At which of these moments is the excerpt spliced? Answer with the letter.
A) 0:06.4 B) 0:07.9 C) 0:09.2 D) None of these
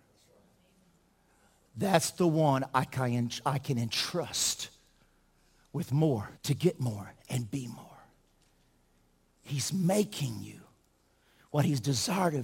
A